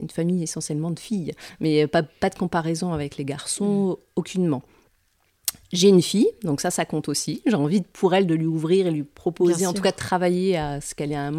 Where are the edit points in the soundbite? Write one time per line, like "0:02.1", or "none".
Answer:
none